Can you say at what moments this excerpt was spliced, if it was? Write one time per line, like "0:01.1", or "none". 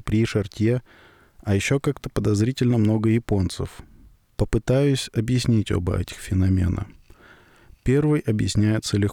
none